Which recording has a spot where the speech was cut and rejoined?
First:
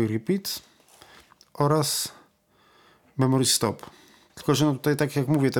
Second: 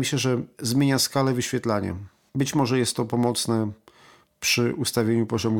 first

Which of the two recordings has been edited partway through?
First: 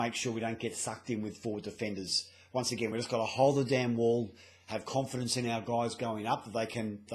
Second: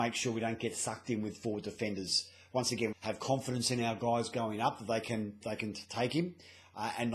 second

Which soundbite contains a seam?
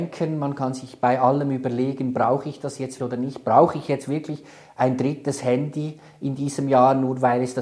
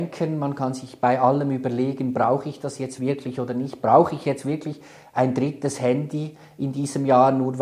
first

